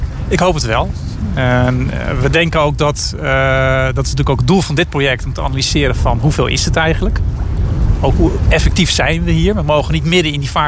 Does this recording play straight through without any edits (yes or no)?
yes